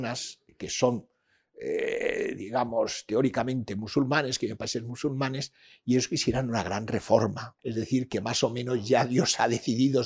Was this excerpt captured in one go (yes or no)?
no